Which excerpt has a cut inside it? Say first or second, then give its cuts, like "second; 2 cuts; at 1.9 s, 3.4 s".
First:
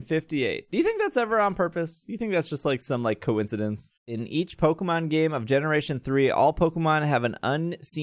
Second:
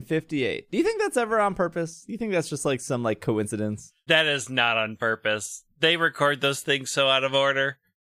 first; 1 cut; at 4.0 s